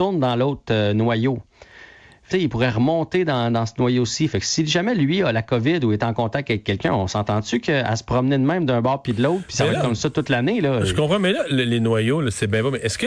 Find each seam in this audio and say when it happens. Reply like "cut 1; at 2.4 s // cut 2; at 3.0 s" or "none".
cut 1; at 2.3 s